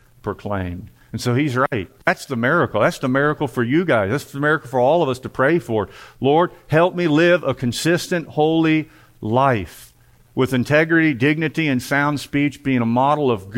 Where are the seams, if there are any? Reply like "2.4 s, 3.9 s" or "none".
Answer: none